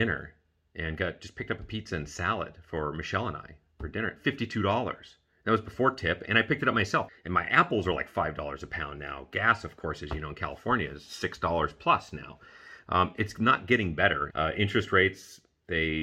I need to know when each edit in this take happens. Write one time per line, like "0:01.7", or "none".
0:07.1
0:14.3

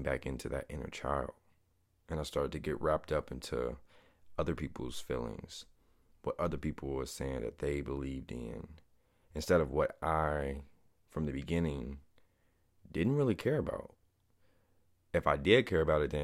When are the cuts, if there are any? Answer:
none

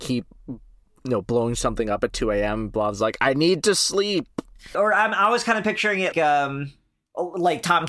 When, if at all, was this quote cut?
0:04.7
0:06.1

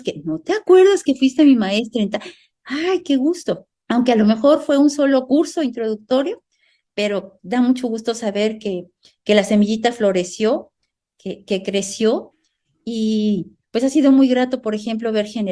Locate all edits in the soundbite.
none

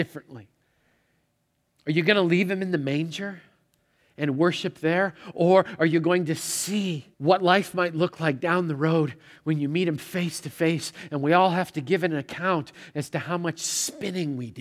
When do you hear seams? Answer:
0:07.1

